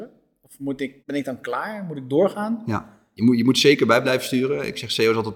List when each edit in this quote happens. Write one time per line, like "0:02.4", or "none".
0:01.0